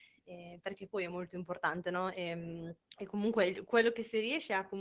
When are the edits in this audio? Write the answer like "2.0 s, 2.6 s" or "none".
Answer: 2.8 s